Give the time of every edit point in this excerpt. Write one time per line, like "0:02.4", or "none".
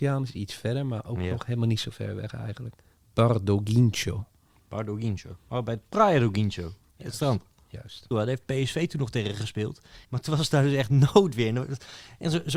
0:08.1
0:10.0